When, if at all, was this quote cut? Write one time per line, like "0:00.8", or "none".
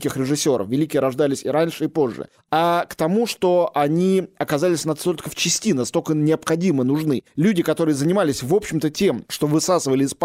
none